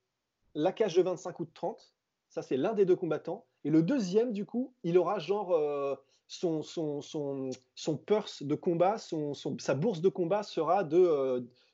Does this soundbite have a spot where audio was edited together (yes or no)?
yes